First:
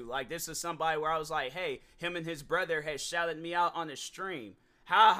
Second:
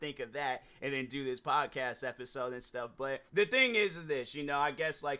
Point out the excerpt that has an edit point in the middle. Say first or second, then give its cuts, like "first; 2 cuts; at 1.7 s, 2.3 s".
second; 1 cut; at 3.3 s